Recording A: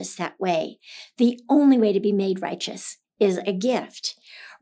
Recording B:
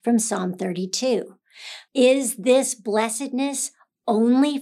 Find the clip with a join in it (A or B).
B